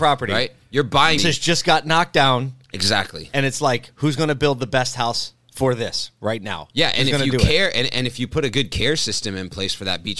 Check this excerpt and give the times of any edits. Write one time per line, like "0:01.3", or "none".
0:01.2